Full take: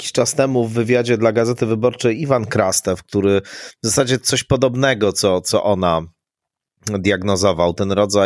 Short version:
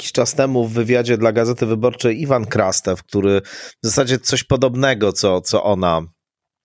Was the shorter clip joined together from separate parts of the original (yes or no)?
no